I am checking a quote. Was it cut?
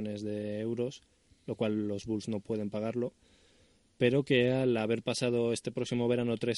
no; 0 cuts

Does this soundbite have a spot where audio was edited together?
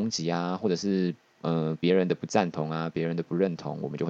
no; 0 cuts

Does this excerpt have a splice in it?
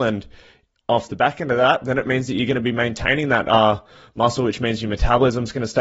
no; 0 cuts

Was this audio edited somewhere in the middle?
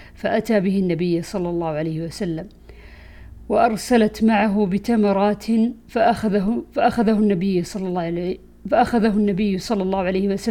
no; 0 cuts

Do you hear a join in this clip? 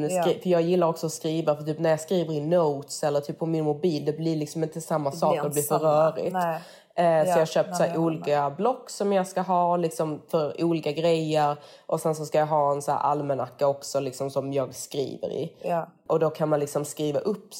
no; 0 cuts

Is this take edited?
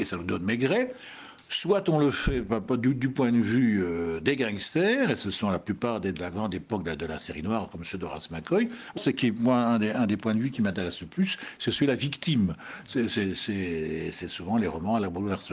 yes; 2 cuts; at 6.1 s, 9.0 s

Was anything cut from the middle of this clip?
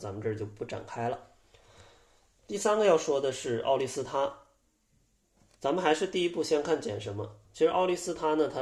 no; 0 cuts

